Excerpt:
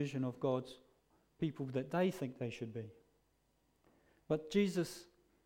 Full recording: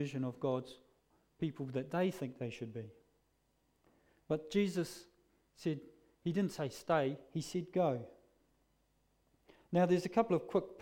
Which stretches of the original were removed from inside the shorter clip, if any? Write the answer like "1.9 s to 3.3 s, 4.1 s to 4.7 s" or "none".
none